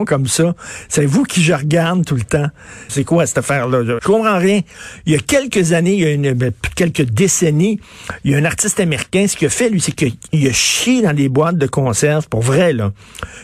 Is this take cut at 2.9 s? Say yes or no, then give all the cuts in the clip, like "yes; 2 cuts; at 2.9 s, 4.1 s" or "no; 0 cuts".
yes; 2 cuts; at 2.9 s, 4.0 s